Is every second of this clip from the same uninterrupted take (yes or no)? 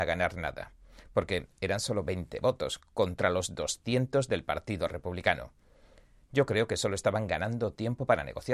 yes